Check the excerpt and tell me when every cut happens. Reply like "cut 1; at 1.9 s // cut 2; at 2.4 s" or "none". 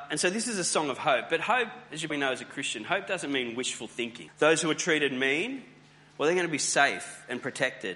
cut 1; at 2.1 s // cut 2; at 4.3 s